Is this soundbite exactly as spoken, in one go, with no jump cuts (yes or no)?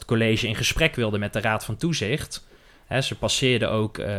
yes